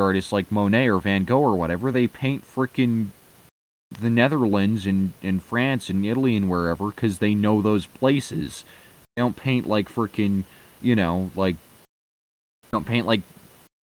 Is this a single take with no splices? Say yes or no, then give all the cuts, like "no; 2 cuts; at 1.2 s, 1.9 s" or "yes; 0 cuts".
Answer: yes; 0 cuts